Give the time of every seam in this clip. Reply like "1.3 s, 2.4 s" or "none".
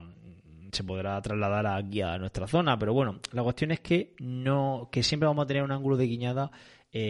none